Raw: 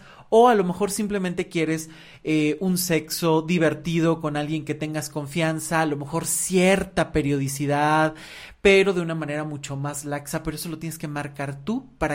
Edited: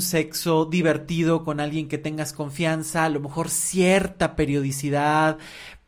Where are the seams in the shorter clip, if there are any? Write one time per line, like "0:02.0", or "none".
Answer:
none